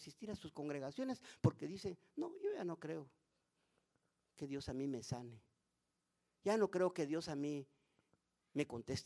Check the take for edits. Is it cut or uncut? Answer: uncut